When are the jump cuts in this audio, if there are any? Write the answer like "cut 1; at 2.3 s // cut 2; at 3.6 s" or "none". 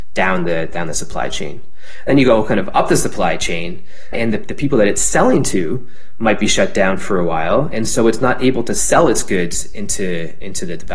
cut 1; at 4.1 s